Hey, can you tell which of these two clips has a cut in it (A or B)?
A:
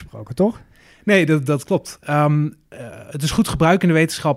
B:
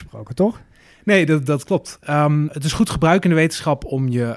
B